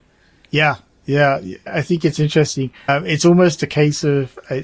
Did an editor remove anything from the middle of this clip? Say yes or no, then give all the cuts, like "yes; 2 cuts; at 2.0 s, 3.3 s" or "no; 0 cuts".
no; 0 cuts